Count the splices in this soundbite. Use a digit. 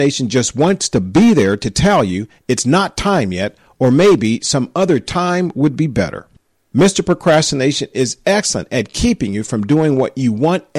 0